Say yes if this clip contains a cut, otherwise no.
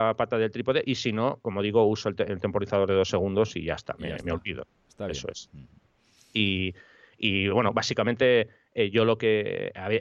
no